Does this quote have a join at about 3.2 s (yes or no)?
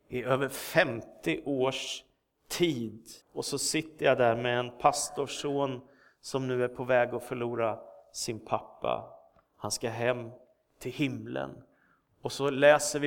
yes